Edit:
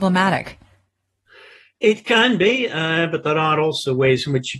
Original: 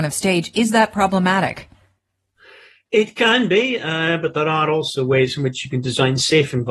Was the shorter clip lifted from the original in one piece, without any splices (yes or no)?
yes